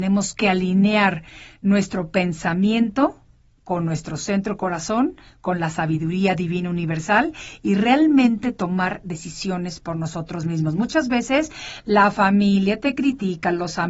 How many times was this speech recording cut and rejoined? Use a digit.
0